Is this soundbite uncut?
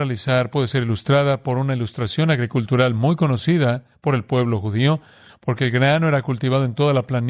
yes; 0 cuts

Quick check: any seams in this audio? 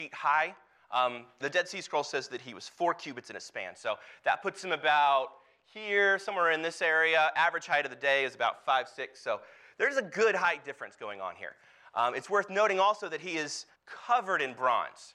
yes; 2 cuts; at 1.4 s, 13.8 s

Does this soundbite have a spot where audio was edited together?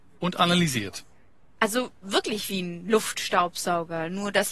no; 0 cuts

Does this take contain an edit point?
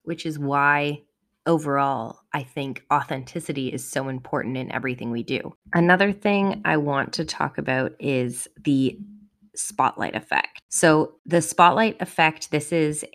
no; 0 cuts

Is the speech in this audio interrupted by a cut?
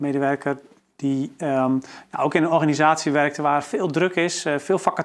no; 0 cuts

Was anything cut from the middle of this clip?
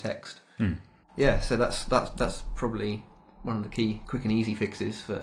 no; 0 cuts

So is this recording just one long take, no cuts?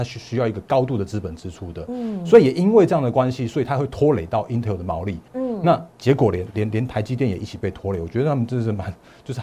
no; 1 cut; at 5.3 s

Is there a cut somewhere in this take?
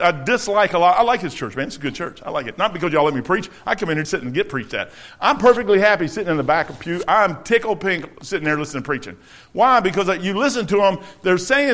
yes; 1 cut; at 4.0 s

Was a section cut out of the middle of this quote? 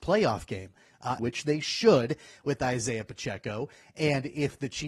yes; 1 cut; at 1.2 s

